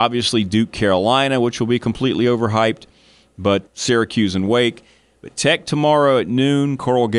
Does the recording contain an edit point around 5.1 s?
no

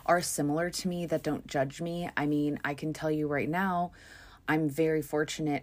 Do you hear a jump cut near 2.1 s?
no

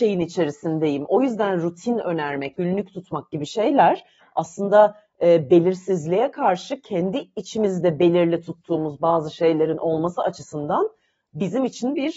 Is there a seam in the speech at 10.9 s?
no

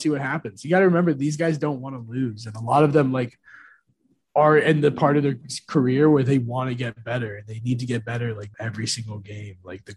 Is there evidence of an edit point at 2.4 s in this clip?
no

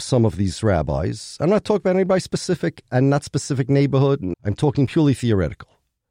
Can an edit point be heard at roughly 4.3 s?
yes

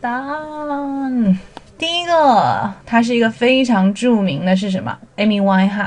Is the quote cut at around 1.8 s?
yes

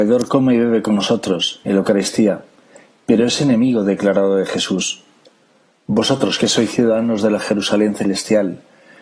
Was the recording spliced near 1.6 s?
no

